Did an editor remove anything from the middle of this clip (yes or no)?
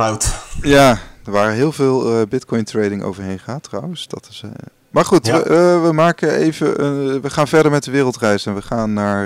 no